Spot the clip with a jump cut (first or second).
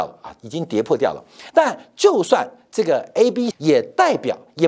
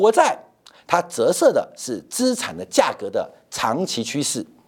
first